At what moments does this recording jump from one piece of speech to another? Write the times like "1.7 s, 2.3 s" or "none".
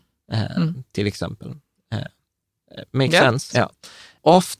3.5 s